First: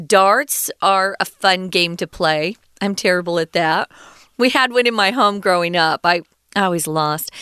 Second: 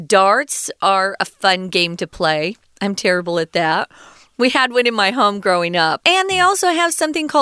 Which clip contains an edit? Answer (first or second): second